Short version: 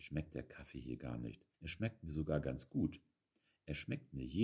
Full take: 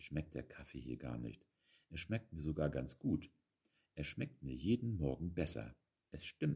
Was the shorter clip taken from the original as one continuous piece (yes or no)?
no